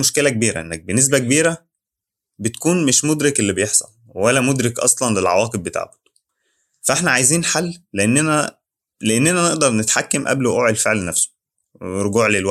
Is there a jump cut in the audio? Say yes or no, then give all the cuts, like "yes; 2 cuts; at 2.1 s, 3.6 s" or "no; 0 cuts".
no; 0 cuts